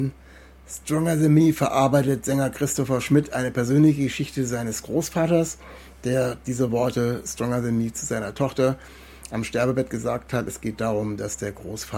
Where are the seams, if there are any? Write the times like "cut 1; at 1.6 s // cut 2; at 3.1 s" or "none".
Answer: none